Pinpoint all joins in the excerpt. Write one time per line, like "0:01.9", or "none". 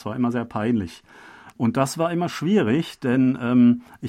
0:01.6